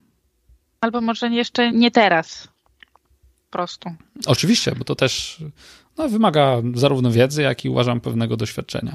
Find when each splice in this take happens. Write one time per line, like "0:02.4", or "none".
0:01.7